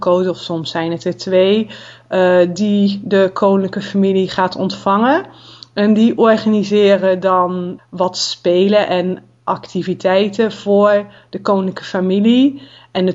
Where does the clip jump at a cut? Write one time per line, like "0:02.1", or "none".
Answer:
0:07.8

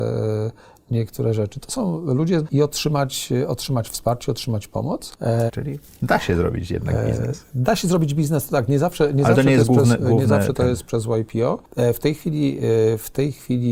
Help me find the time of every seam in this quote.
0:02.4
0:05.5

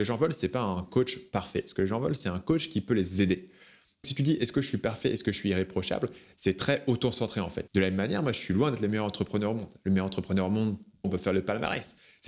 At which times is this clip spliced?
0:04.0
0:07.7
0:11.0

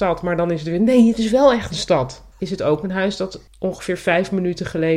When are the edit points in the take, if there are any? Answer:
0:02.3
0:03.5

